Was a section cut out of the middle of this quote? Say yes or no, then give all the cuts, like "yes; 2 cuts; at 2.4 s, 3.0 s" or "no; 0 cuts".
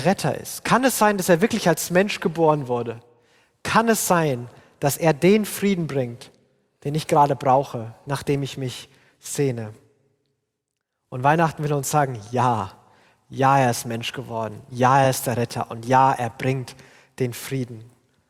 no; 0 cuts